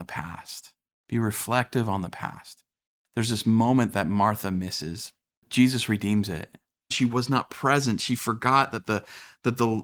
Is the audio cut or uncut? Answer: cut